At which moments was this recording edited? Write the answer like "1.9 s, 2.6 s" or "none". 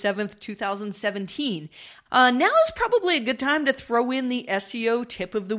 2.1 s